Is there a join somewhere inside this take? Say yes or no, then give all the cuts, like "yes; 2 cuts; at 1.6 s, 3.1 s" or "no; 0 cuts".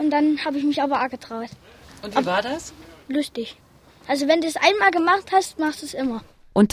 no; 0 cuts